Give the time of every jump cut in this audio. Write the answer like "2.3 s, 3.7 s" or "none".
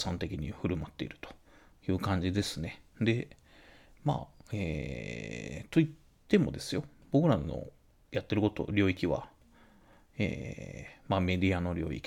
none